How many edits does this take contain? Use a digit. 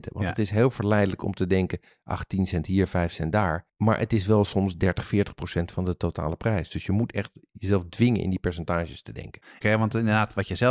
2